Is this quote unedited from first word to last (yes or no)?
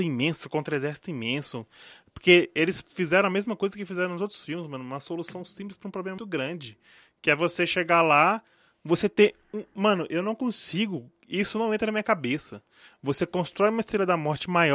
no